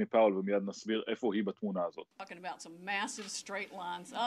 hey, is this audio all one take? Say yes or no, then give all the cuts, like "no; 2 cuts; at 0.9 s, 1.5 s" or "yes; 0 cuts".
no; 1 cut; at 2.1 s